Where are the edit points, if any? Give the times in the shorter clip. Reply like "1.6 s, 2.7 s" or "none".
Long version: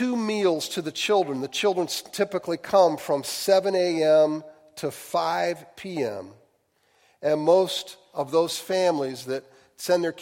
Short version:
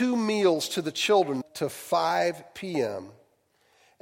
1.4 s